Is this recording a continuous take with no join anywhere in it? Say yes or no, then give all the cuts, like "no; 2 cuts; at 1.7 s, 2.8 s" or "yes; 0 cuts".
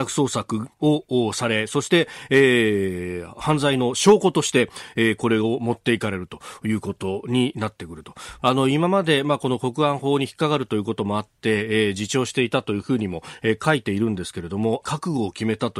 no; 2 cuts; at 8.4 s, 14.8 s